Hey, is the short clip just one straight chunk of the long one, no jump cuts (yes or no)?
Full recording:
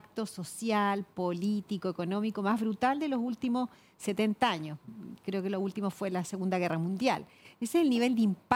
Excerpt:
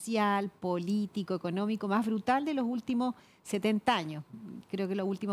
yes